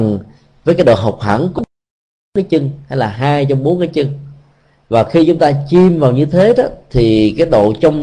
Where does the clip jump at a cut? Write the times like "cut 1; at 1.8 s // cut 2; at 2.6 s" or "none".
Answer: none